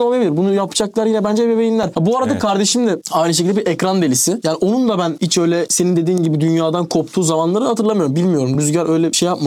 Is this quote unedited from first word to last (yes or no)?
yes